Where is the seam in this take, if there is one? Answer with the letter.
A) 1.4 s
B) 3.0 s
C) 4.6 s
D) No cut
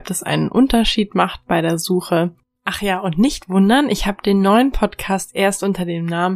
D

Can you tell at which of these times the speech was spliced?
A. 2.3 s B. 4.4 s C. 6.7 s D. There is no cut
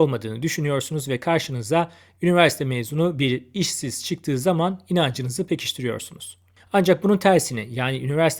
D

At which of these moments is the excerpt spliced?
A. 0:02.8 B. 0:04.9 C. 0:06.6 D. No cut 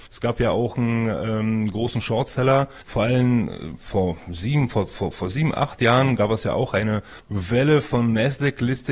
A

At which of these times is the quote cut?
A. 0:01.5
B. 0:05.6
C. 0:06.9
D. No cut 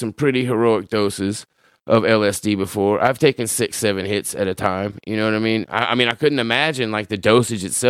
B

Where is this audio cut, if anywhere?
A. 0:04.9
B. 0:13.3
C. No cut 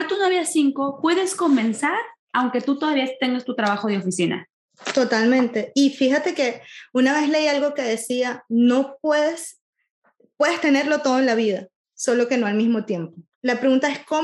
B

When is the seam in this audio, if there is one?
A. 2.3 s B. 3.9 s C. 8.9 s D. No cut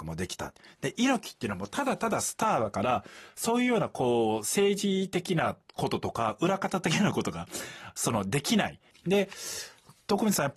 C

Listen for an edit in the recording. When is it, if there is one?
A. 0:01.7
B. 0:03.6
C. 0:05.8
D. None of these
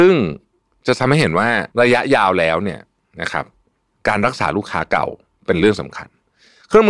A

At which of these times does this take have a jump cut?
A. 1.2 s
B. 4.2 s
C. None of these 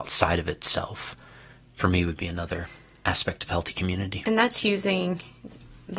C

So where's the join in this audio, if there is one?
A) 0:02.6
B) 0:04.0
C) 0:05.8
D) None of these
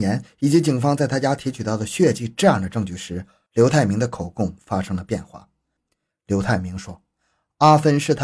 C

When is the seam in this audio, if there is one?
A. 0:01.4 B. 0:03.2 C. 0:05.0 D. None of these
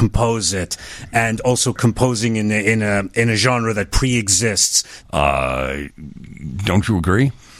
C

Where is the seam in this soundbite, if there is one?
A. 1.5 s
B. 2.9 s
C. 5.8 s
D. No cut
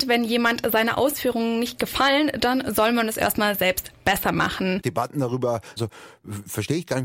C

